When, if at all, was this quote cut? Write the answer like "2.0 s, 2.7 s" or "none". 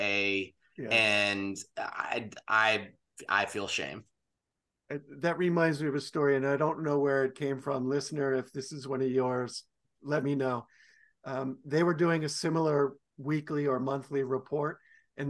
9.8 s